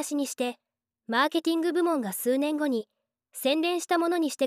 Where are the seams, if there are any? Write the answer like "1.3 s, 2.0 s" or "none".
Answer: none

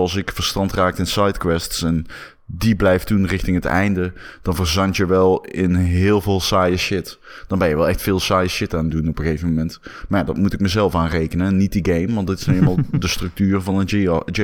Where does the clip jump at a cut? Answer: none

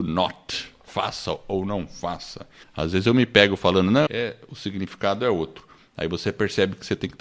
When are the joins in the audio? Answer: 2.6 s, 4.1 s

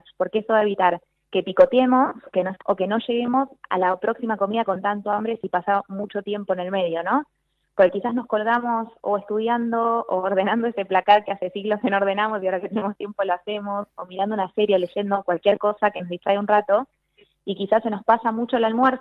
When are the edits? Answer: 2.6 s

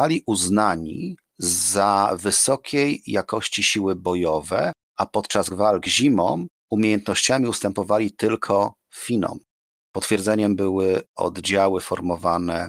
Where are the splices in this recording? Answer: 9.8 s

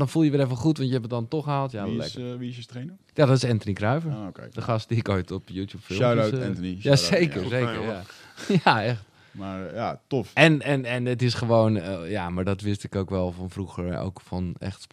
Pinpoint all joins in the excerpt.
none

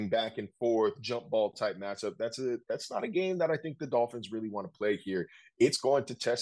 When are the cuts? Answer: none

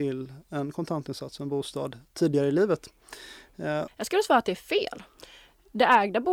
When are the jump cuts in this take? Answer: 3.9 s

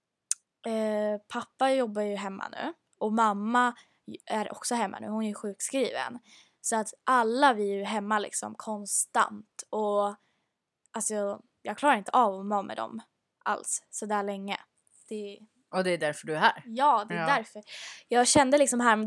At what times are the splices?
none

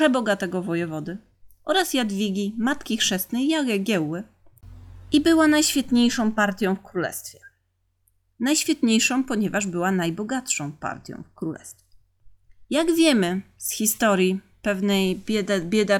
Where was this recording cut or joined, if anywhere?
none

